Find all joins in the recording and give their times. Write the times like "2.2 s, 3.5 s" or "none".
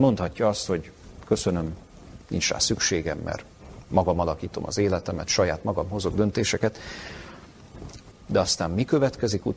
8.1 s